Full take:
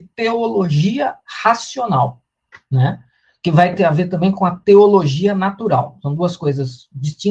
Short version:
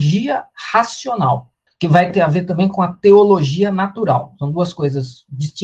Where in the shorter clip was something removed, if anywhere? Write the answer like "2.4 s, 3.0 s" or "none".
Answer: 1.7 s